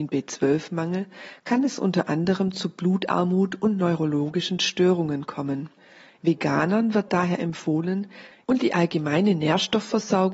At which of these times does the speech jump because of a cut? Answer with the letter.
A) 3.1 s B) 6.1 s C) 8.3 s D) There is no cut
C